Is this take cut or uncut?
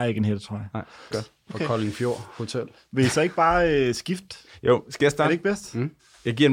cut